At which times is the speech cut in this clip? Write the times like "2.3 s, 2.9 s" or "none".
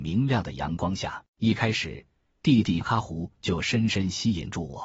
1.3 s, 2.8 s

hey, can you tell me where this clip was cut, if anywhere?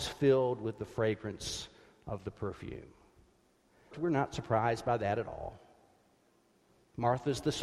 3.9 s

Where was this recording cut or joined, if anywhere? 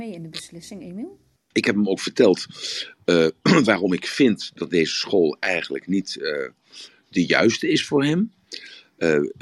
1.5 s

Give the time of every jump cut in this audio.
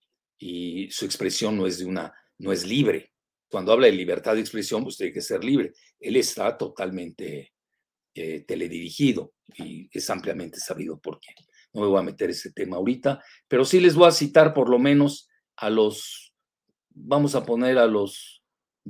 3.5 s

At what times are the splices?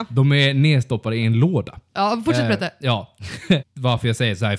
3.6 s

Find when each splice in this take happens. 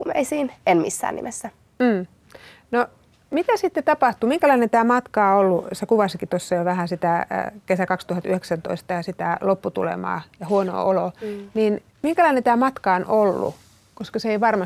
11.9 s

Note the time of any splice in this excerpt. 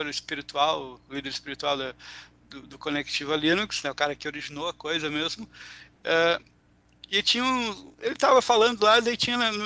none

